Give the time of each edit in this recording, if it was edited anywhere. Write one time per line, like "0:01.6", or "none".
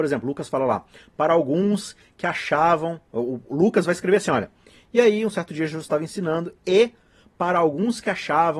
none